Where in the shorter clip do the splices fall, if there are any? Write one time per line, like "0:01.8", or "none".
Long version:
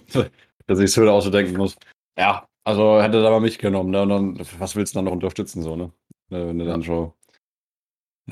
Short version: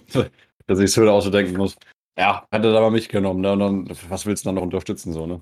0:02.5